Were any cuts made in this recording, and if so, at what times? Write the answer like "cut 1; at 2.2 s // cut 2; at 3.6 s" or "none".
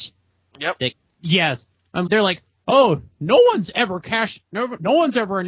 cut 1; at 2.1 s